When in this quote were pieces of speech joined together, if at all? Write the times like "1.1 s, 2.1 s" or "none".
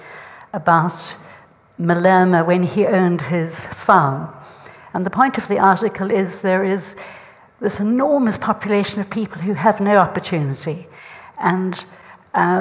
4.9 s